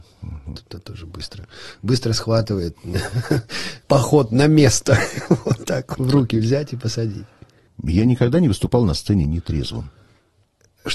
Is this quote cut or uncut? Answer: cut